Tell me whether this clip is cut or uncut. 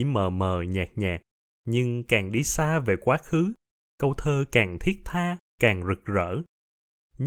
uncut